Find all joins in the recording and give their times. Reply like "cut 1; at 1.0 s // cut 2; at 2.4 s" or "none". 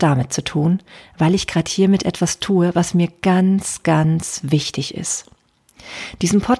none

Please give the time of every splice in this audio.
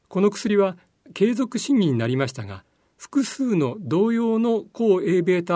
none

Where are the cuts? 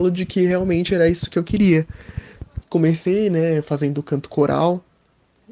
cut 1; at 2.6 s

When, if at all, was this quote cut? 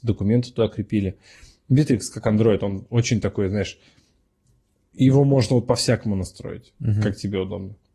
cut 1; at 1.6 s

